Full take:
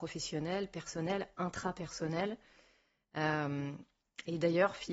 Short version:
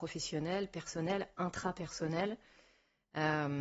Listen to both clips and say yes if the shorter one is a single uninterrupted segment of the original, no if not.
yes